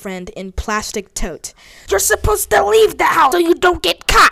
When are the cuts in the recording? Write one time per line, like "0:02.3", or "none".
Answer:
0:01.9
0:03.3